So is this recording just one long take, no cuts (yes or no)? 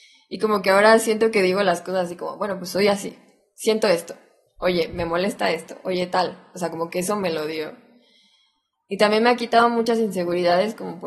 yes